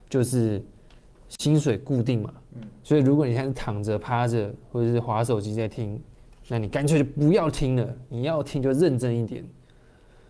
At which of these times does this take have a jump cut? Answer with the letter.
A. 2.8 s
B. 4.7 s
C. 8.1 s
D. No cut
A